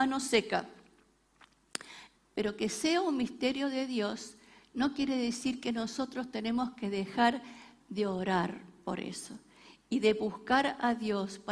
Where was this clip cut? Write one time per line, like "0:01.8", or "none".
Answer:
0:02.2